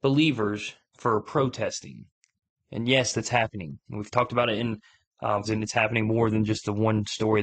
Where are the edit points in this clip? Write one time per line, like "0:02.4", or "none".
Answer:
0:05.4